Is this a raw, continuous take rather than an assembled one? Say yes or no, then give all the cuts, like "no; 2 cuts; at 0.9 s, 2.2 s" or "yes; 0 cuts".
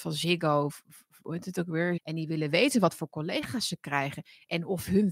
no; 1 cut; at 2.0 s